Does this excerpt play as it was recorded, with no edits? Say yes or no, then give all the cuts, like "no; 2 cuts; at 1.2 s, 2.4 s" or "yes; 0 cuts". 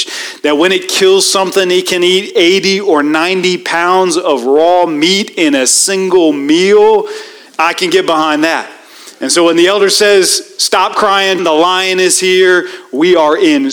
no; 2 cuts; at 7.5 s, 11.4 s